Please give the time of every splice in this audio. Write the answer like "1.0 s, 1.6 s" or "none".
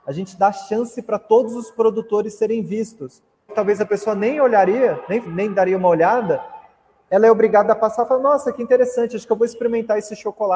3.5 s, 5.3 s